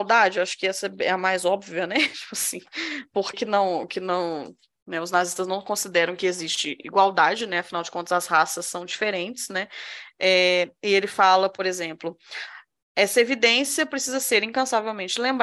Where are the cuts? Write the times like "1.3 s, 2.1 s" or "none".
3.3 s